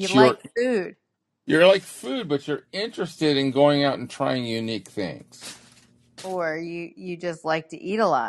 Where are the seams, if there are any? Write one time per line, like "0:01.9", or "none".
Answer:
none